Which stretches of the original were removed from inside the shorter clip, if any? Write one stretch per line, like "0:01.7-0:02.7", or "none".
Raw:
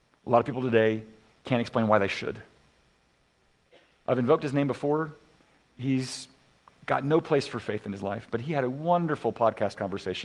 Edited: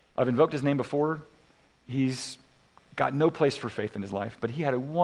none